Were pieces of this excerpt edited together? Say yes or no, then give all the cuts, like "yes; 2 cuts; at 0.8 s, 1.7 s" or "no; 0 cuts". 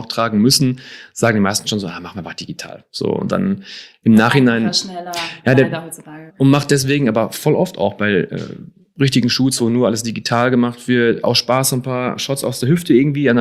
yes; 1 cut; at 6.3 s